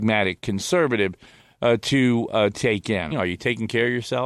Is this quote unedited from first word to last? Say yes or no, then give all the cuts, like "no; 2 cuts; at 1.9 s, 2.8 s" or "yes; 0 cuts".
no; 1 cut; at 3.1 s